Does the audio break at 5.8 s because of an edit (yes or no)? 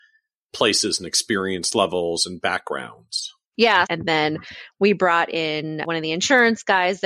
no